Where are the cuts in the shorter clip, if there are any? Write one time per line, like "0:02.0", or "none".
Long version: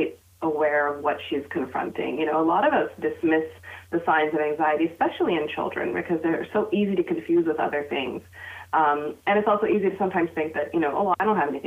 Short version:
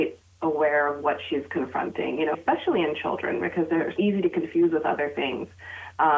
0:02.3
0:04.0